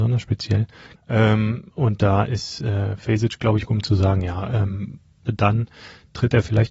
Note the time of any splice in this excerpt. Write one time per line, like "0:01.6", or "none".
0:01.0
0:03.7
0:05.3